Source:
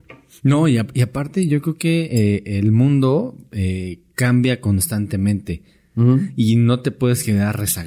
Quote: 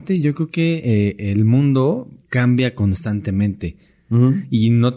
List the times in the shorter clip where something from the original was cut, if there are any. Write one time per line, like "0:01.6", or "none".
0:02.2